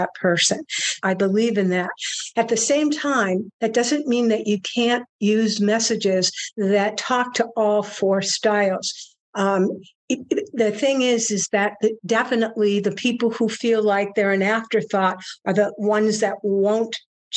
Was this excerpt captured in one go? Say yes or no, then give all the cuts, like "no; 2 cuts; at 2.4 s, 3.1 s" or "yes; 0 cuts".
no; 1 cut; at 1.0 s